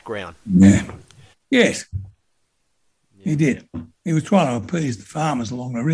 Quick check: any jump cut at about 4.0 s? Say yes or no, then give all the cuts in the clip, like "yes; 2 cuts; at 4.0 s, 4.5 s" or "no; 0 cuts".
no; 1 cut; at 1.3 s